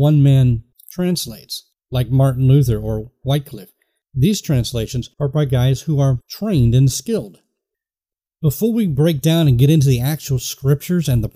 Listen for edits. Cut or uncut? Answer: uncut